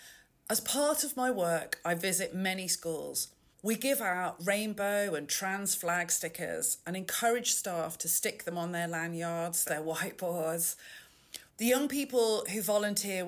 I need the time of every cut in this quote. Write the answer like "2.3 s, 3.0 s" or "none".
3.5 s, 9.7 s, 11.5 s